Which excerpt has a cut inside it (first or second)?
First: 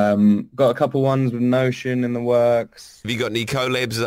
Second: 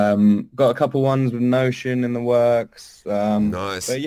first